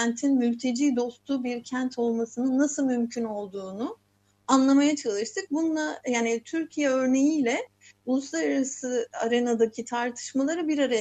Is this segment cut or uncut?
uncut